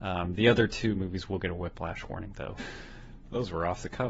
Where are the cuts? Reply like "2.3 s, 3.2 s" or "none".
2.6 s